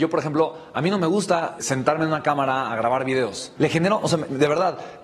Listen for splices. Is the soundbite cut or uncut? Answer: cut